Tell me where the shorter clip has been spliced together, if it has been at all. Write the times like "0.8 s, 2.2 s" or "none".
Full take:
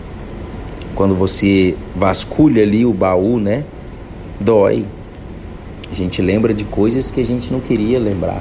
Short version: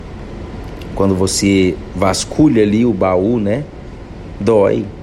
none